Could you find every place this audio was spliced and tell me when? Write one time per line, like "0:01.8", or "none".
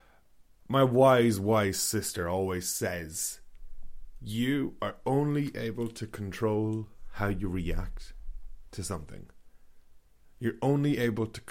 none